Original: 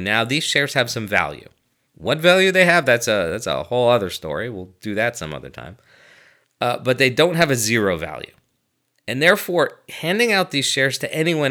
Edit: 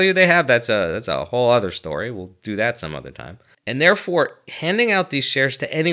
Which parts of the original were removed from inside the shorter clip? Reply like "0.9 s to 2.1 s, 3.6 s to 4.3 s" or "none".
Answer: 5.9 s to 9.0 s